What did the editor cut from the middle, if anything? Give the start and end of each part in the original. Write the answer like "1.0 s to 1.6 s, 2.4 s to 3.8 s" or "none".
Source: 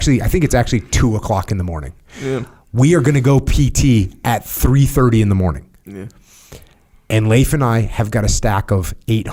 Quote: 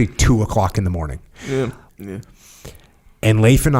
2.6 s to 5.8 s